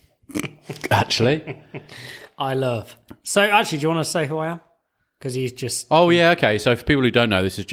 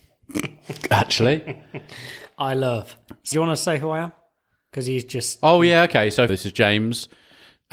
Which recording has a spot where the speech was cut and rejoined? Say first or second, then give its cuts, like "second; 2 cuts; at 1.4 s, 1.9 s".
second; 2 cuts; at 3.3 s, 6.3 s